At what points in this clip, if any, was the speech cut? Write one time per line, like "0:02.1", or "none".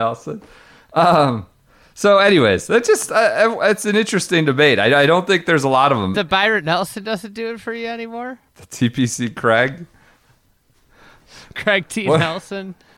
0:06.1
0:08.5